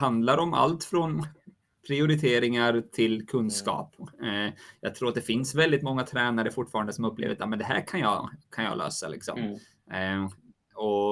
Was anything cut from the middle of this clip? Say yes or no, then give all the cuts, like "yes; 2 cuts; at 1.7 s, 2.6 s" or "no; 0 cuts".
no; 0 cuts